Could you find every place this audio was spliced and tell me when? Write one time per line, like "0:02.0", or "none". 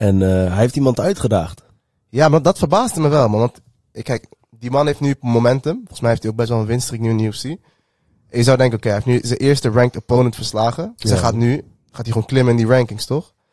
none